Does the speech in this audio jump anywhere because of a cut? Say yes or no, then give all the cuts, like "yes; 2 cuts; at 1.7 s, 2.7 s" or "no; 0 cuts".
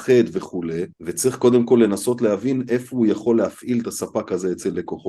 yes; 1 cut; at 0.9 s